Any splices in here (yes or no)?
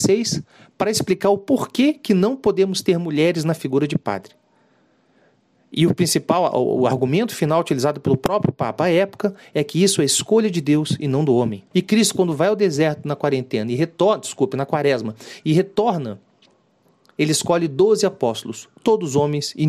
yes